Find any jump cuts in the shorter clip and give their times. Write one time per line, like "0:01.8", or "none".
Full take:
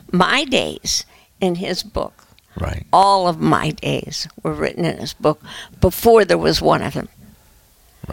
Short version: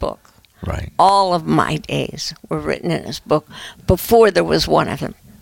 none